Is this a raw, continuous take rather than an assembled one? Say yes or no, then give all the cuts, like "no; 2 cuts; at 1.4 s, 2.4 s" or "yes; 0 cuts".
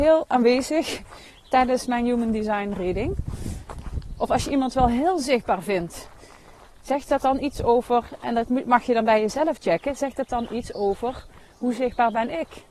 no; 1 cut; at 4.2 s